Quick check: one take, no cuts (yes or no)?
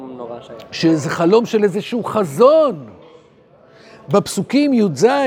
yes